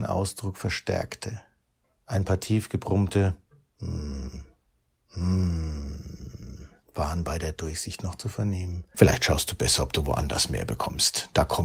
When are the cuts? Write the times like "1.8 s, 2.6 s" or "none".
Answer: 8.9 s